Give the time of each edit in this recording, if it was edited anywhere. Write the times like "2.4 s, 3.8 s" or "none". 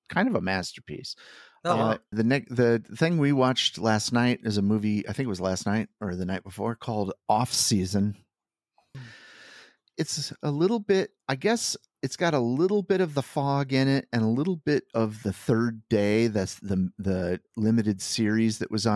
2.1 s, 8.9 s, 11.2 s

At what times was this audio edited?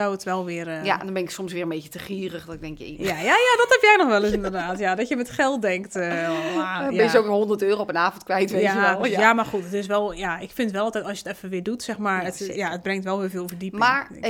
none

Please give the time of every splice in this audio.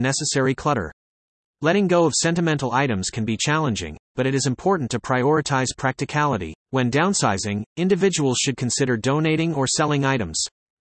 1.4 s, 6.6 s

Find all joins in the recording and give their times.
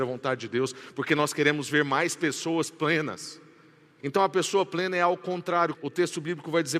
4.0 s, 5.7 s

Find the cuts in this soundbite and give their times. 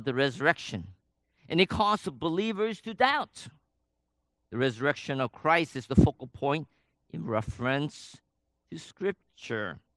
4.4 s

